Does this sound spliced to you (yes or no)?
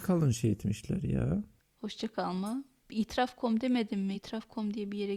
no